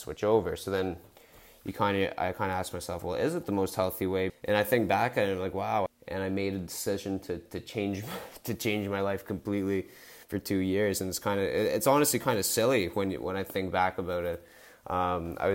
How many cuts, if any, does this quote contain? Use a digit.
2